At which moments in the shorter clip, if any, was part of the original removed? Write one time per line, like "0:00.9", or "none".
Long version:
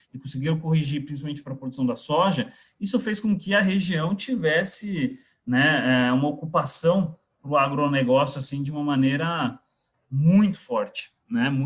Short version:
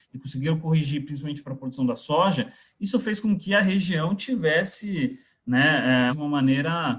0:06.1